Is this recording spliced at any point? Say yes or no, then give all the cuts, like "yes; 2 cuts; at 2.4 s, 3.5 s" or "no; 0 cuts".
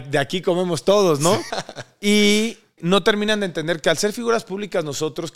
yes; 2 cuts; at 1.5 s, 2.8 s